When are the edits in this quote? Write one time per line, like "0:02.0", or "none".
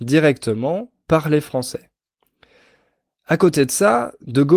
none